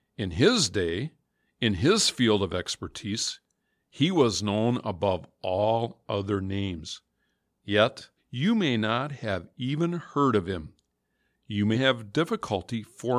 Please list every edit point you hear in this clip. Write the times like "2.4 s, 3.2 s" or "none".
8.2 s, 11.7 s